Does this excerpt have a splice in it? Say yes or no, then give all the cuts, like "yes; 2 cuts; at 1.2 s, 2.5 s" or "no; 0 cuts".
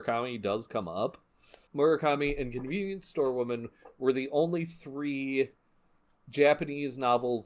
yes; 1 cut; at 1.7 s